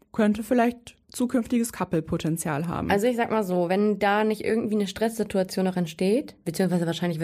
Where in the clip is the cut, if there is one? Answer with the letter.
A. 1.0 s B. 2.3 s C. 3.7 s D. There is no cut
A